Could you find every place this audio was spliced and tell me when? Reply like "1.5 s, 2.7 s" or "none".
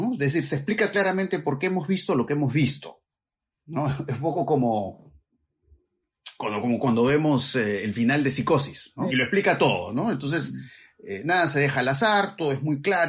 9.1 s